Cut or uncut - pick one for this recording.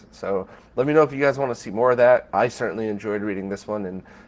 uncut